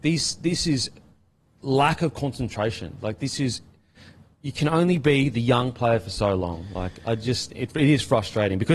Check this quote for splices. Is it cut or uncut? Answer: uncut